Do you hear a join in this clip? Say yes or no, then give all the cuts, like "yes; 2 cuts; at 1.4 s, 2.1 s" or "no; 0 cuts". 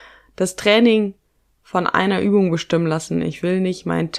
no; 0 cuts